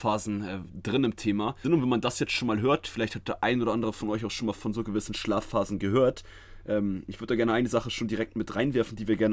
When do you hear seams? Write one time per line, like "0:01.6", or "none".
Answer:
0:01.6

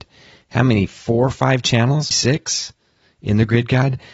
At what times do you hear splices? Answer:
0:02.1

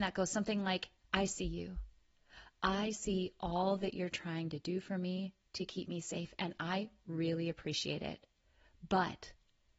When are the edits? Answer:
0:01.0

